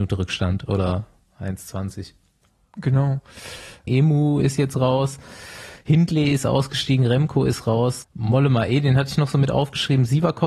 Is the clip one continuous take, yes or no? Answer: no